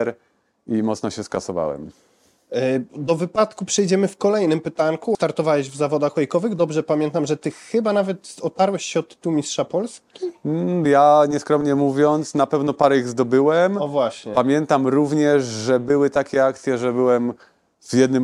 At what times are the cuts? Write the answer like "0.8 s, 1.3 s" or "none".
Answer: 5.1 s